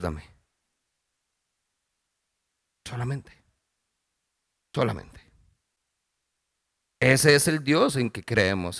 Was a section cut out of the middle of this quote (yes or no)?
yes